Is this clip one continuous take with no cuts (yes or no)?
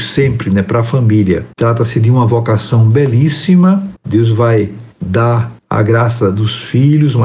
no